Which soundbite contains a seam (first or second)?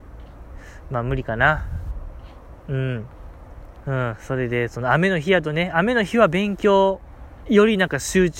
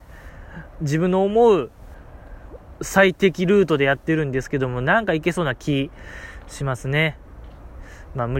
first